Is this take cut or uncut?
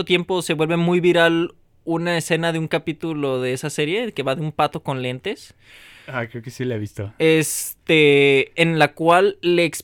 uncut